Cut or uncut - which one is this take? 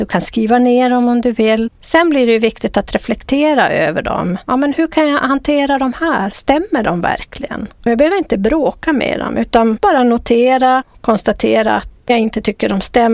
uncut